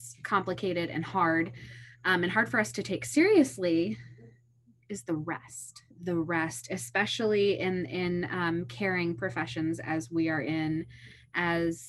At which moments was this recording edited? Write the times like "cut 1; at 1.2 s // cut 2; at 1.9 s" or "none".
cut 1; at 5.9 s